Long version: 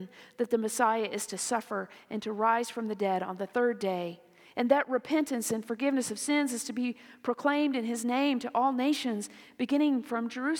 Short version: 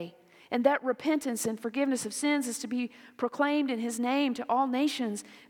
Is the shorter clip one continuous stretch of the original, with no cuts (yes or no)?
yes